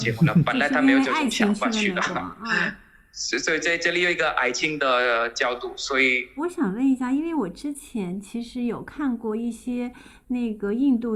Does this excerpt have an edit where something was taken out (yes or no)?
yes